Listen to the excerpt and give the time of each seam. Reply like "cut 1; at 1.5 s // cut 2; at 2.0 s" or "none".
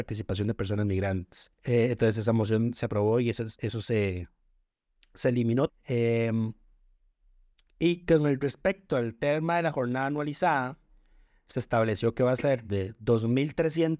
cut 1; at 1.5 s // cut 2; at 5.7 s